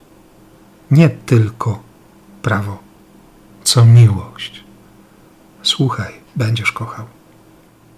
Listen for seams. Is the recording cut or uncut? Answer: cut